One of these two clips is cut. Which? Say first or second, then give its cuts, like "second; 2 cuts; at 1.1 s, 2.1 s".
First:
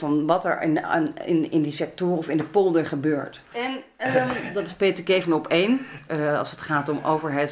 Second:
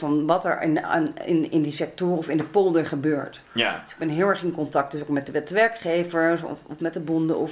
first; 2 cuts; at 3.5 s, 6.1 s